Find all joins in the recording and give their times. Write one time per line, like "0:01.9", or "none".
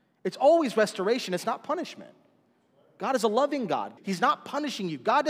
0:04.0